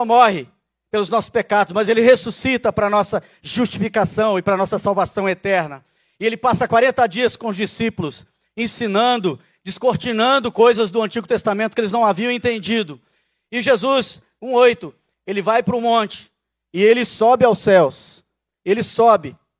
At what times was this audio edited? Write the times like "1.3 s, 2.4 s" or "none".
14.4 s

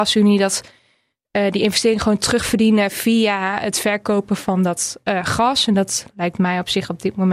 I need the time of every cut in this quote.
none

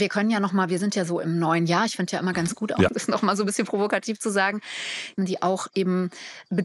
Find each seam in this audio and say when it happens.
2.9 s, 5.2 s

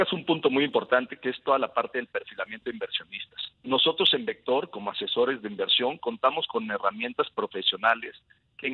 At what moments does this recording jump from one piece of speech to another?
none

